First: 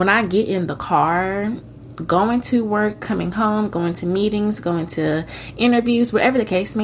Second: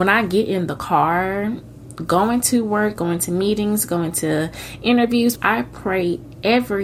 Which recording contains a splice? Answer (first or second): second